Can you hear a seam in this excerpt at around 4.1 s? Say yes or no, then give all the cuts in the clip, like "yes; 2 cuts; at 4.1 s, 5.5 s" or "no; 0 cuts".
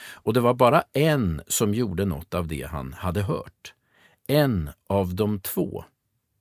no; 0 cuts